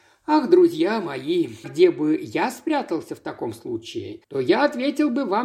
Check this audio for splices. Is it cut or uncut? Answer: cut